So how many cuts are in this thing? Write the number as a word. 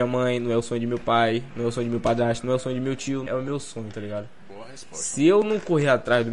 one